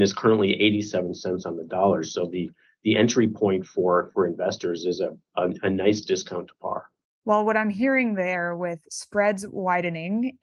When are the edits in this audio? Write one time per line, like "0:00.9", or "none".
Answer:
none